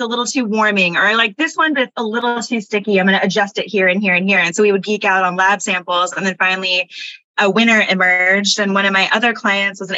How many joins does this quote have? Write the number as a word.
zero